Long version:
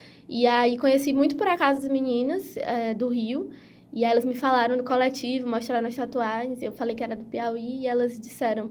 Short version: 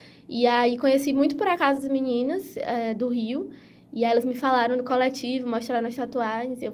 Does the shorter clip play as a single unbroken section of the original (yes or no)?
yes